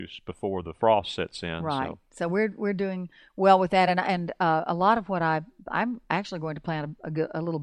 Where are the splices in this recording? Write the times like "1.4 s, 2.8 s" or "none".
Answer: none